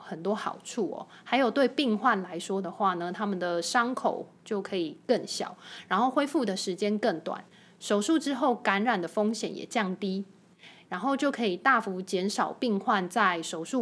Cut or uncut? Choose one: cut